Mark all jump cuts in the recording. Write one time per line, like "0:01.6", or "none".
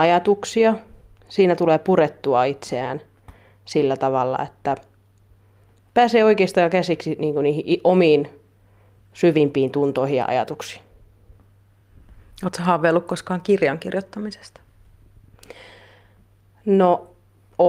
none